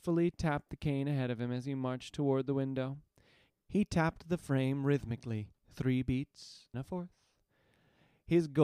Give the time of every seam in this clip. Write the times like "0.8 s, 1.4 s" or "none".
5.6 s, 6.7 s